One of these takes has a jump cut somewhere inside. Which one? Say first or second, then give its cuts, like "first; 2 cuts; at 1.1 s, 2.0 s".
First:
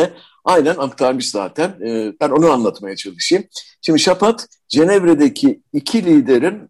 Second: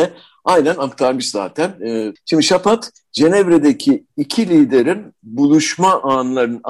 second; 1 cut; at 2.2 s